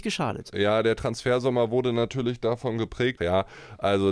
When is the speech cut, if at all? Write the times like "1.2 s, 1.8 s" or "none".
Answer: 3.2 s